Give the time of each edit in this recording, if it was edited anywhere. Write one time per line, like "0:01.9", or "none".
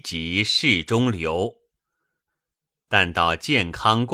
none